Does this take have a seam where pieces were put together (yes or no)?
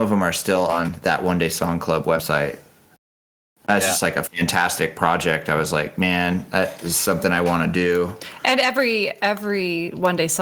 no